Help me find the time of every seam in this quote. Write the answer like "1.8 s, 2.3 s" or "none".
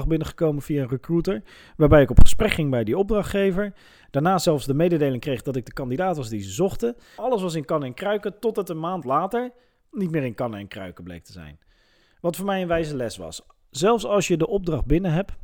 7.2 s